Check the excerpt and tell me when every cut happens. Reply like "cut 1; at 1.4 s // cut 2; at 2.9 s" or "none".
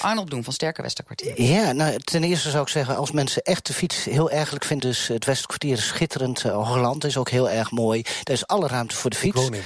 cut 1; at 4.8 s